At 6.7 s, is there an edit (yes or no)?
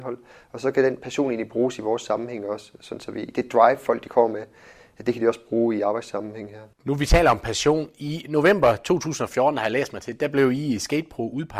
no